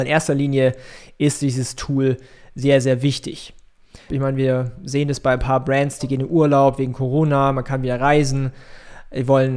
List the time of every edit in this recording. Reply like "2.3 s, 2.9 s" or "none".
4.1 s, 6.0 s

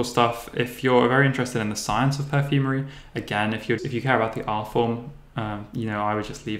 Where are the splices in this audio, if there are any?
3.8 s

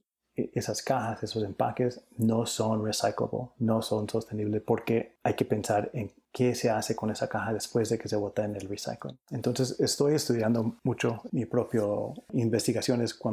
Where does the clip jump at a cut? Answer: 9.2 s, 11.3 s

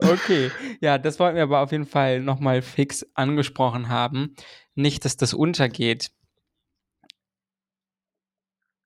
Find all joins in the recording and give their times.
none

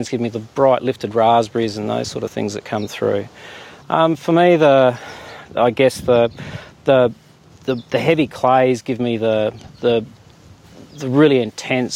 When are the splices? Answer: 3.8 s

